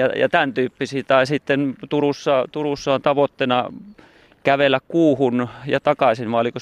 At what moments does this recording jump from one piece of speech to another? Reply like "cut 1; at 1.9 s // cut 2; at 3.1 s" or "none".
none